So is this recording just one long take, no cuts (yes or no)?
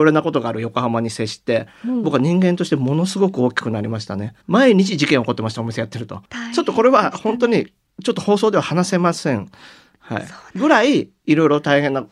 no